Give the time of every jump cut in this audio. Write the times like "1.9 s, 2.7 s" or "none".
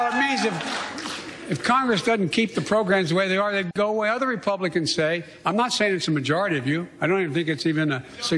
none

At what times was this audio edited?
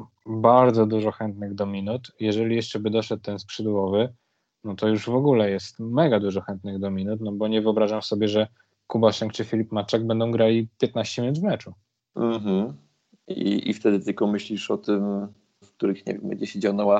12.0 s, 15.6 s

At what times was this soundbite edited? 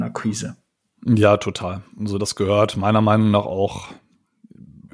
none

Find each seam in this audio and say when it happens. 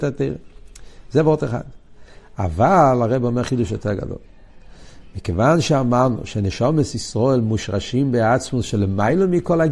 none

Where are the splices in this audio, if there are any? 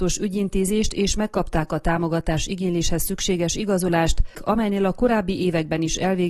4.3 s

